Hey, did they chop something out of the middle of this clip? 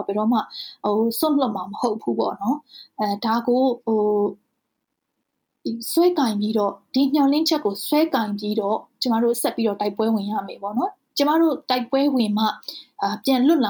yes; 1 cut; at 3.8 s

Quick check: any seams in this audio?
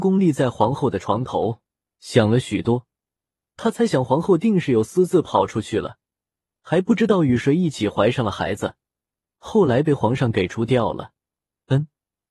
no; 0 cuts

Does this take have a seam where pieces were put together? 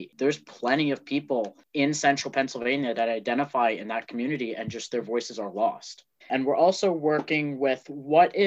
yes; 1 cut; at 6.2 s

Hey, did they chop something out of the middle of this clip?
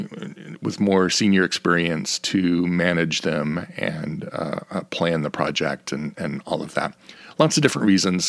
no; 0 cuts

